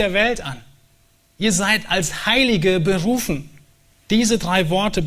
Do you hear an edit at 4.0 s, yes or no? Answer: no